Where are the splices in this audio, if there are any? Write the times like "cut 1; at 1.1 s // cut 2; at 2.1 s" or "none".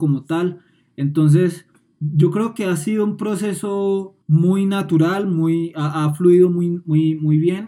cut 1; at 4.2 s